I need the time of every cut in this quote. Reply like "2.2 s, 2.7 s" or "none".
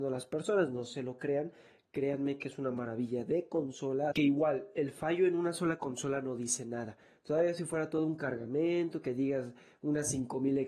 4.1 s